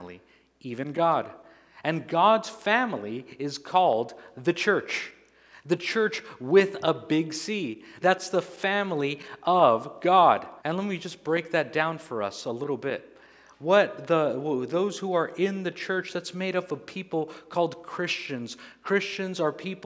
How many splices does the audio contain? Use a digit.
2